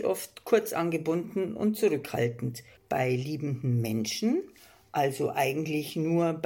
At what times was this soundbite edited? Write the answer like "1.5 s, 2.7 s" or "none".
2.8 s